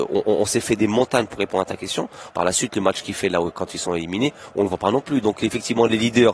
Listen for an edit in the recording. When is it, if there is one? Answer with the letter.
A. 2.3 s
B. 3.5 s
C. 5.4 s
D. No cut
A